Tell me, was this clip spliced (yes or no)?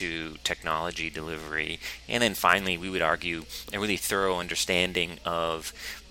no